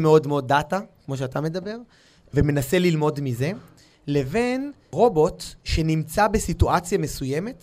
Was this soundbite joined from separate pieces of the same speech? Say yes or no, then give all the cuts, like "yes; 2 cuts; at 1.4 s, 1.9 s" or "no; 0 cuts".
no; 0 cuts